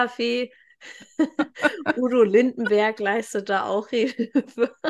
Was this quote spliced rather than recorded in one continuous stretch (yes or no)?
no